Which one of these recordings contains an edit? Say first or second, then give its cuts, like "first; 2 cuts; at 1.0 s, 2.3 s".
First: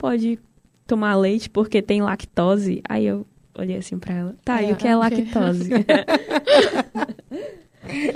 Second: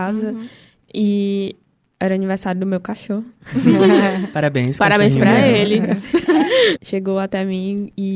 second; 1 cut; at 6.8 s